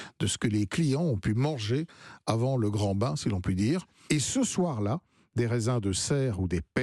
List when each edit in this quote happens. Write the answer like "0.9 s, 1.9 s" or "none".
4.1 s